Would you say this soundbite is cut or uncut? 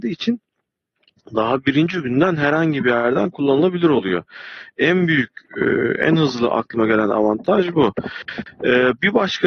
uncut